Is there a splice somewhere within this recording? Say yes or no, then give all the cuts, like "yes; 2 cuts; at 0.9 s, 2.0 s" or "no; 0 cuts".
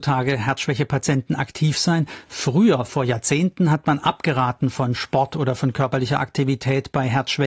no; 0 cuts